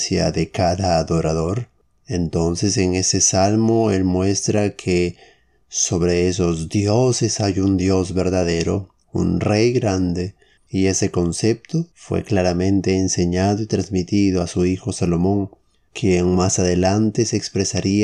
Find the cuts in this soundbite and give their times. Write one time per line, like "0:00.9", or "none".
0:10.6
0:11.9